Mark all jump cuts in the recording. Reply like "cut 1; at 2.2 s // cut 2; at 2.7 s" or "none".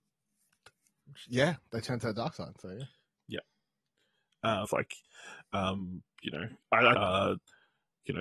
cut 1; at 4.6 s // cut 2; at 6.9 s